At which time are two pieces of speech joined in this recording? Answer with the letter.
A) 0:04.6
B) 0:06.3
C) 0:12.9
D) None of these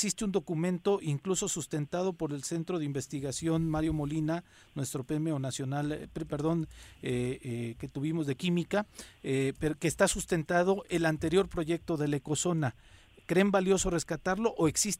B